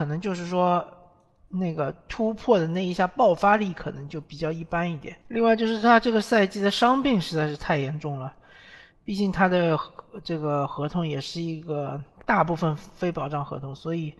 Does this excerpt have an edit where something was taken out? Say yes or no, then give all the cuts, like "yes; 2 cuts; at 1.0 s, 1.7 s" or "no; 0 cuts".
yes; 1 cut; at 8.9 s